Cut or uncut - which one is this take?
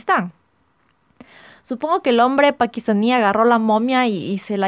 uncut